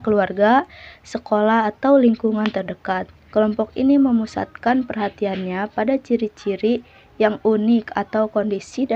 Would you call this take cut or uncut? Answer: cut